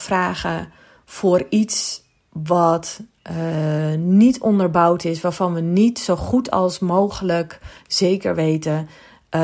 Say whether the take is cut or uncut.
uncut